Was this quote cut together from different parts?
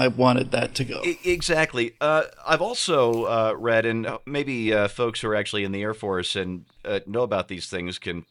no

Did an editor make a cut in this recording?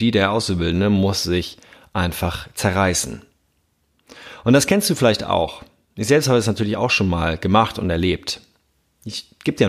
no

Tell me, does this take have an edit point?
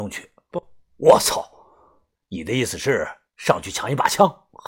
yes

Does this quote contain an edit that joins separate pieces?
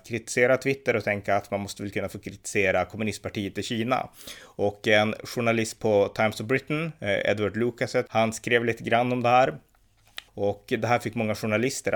yes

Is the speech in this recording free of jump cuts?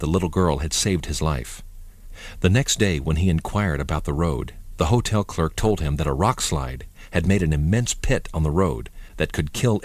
yes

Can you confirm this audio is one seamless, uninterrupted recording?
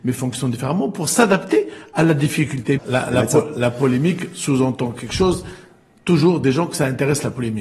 no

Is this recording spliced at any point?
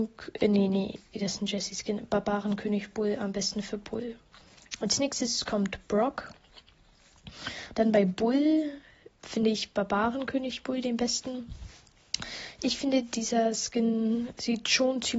yes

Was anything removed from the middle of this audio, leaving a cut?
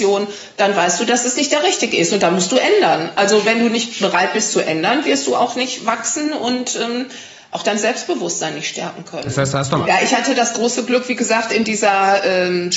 yes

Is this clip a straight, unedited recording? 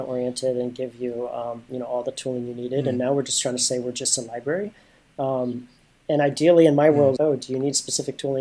no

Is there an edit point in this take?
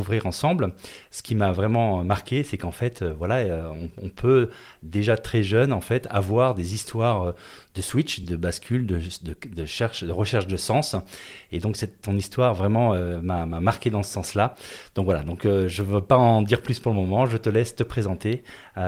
no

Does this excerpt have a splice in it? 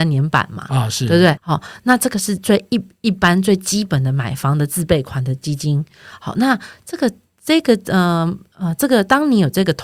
yes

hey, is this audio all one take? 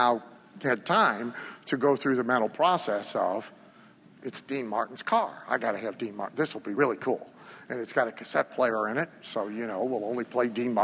yes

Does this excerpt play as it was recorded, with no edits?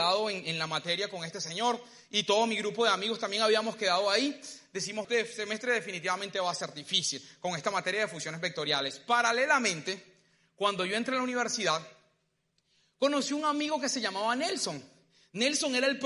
no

